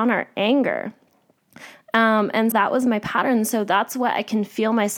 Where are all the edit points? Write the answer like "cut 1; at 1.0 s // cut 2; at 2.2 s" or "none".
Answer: cut 1; at 2.5 s